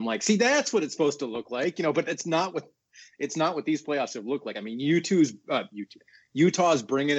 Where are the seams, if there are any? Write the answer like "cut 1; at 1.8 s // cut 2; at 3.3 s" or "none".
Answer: none